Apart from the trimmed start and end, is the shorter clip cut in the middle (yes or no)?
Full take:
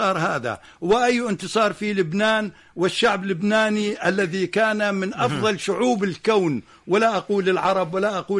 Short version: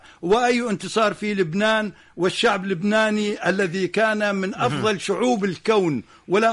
no